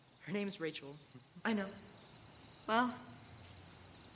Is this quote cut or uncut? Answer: cut